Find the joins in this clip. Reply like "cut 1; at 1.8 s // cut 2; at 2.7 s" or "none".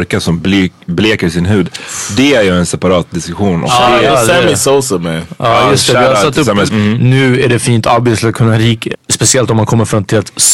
cut 1; at 6.7 s // cut 2; at 8.9 s